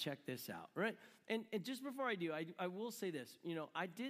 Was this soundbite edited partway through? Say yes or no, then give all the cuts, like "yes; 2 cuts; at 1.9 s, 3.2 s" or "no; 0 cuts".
no; 0 cuts